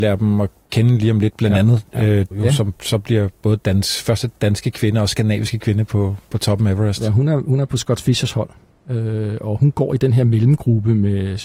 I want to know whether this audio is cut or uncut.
cut